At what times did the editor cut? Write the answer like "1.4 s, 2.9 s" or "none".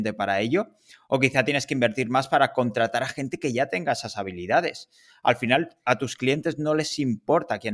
none

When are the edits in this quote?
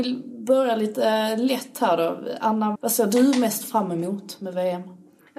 2.7 s

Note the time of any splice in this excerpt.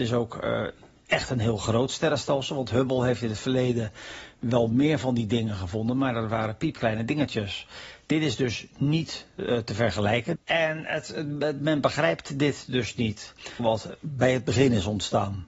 10.4 s, 13.6 s

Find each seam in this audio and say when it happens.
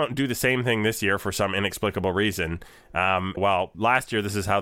3.4 s

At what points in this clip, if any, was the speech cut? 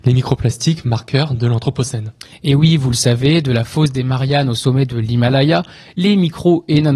none

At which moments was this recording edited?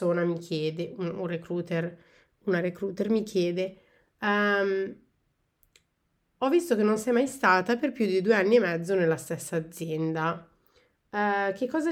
none

